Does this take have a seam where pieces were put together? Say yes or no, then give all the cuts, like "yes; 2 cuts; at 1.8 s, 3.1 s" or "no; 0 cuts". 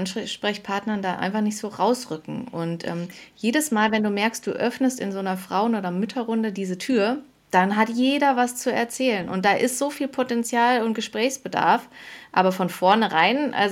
no; 0 cuts